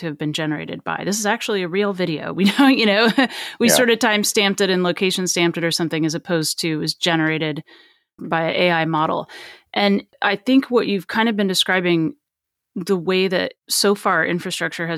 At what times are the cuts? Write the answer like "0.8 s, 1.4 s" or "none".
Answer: none